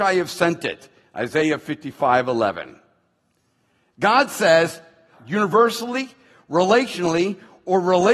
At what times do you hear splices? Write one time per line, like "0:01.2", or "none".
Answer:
0:05.2